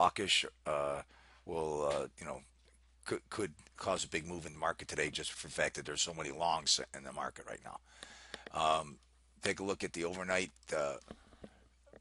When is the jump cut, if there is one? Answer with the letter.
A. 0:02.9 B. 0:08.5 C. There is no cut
C